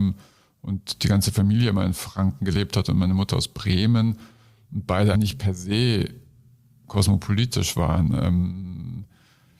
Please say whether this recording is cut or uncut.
cut